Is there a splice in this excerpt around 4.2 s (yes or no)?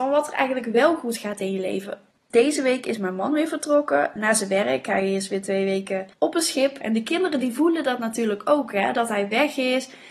yes